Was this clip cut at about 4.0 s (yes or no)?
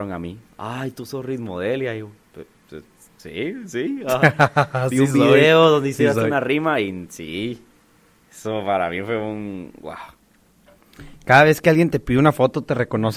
no